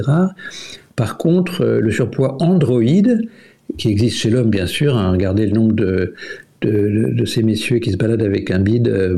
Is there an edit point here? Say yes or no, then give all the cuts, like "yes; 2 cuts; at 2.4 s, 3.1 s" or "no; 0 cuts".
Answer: no; 0 cuts